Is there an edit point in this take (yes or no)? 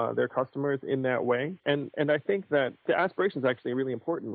yes